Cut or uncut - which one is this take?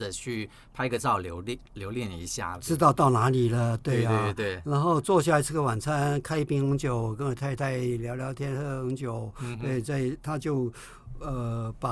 uncut